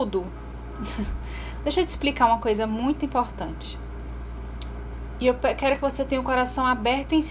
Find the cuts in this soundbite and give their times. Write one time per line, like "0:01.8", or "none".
none